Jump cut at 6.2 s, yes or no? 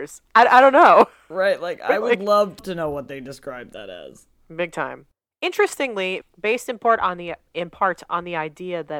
yes